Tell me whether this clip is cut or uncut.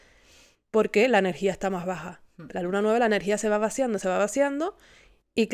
cut